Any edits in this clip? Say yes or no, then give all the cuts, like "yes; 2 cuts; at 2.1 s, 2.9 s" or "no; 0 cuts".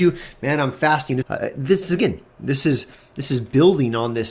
yes; 1 cut; at 1.2 s